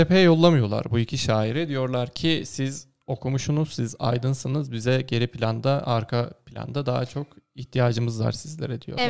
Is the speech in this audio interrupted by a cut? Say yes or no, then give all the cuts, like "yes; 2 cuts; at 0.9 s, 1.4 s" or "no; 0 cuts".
no; 0 cuts